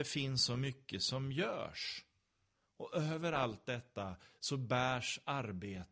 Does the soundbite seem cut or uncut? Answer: uncut